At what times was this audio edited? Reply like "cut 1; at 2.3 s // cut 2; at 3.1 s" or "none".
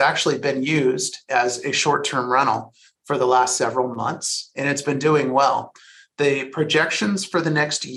none